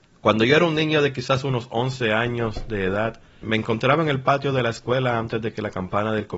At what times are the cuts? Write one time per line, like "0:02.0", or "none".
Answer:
0:03.4